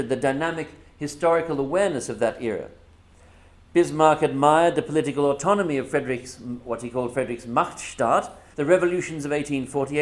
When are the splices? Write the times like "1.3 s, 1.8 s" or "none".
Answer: 8.5 s